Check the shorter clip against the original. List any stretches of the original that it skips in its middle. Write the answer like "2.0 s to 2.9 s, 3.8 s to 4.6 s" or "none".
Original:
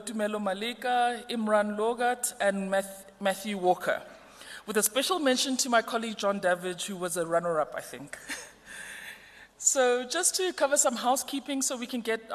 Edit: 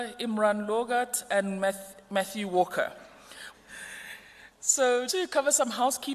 4.6 s to 8.5 s, 10.0 s to 10.3 s